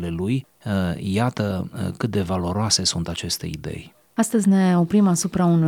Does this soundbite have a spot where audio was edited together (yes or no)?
no